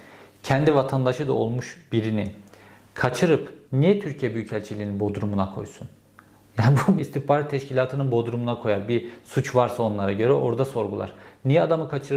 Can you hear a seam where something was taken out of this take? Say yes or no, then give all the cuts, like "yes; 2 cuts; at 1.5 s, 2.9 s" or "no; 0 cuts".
yes; 1 cut; at 7.0 s